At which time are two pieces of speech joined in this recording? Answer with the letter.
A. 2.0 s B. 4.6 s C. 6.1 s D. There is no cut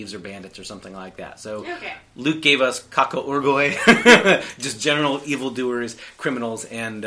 D